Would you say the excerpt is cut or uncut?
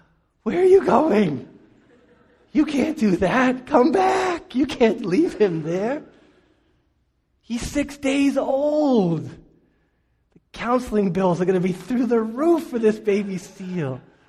cut